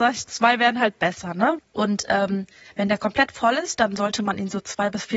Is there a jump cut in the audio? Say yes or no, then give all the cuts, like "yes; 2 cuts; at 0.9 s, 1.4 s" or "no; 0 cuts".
yes; 1 cut; at 1.6 s